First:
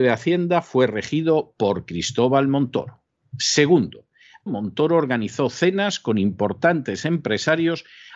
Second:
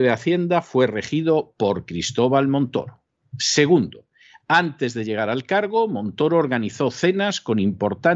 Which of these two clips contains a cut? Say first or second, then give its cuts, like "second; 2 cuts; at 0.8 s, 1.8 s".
first; 1 cut; at 4.5 s